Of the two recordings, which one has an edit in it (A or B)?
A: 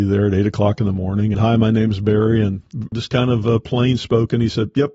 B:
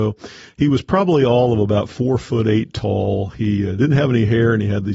A